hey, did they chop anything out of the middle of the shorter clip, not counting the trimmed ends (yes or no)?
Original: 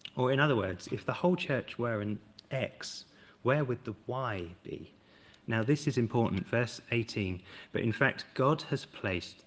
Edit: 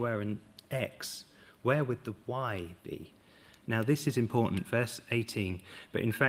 no